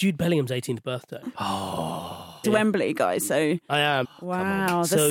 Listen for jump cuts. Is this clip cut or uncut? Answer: cut